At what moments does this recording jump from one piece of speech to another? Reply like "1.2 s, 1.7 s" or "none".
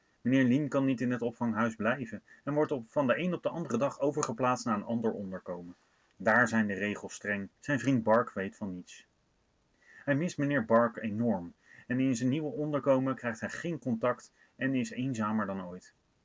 7.6 s